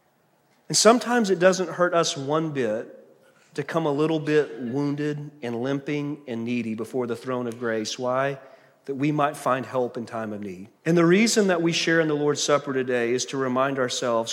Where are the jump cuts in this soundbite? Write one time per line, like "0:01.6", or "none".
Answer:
0:10.8